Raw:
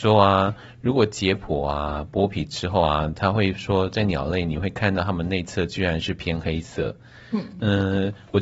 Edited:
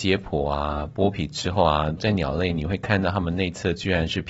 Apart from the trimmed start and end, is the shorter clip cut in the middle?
yes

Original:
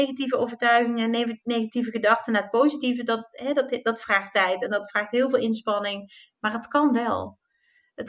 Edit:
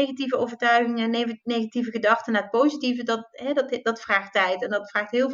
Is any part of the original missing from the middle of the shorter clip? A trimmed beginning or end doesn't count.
no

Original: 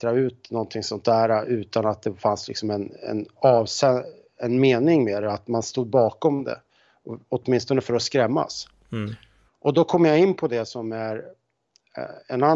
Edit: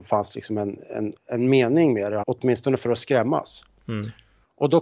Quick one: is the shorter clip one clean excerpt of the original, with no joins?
no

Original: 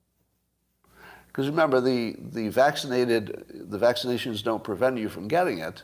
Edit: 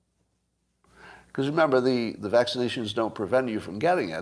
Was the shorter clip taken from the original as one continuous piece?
no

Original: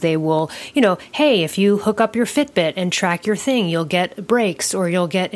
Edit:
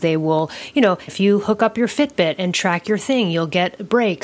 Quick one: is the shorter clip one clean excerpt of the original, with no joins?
no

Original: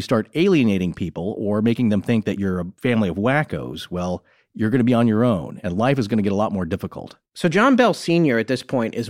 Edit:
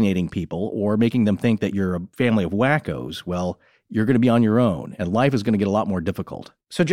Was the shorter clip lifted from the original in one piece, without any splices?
yes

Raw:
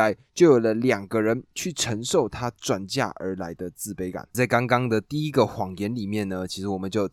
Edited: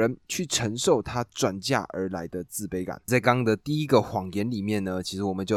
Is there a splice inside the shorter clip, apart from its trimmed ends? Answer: yes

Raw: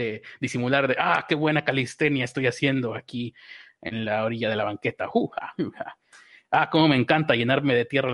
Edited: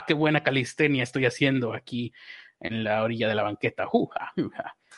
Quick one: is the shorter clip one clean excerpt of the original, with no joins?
yes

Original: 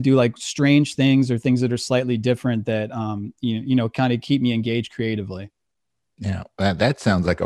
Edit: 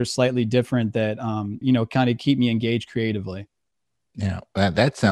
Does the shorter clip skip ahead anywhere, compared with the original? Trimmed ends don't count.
yes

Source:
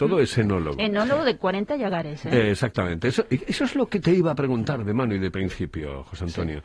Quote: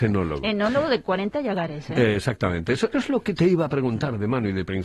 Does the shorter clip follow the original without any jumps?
no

